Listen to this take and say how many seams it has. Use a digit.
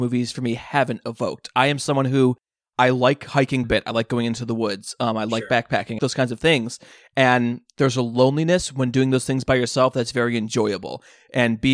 2